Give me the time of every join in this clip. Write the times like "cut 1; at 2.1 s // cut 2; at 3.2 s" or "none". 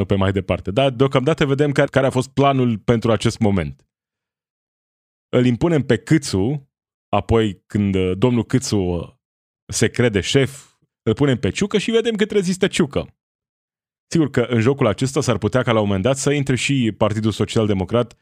cut 1; at 1.8 s // cut 2; at 10.9 s